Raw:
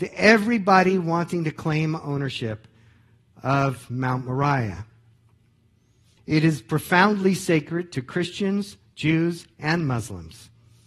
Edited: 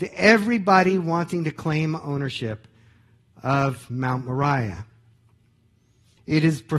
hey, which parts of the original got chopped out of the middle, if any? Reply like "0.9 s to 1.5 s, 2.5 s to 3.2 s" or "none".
none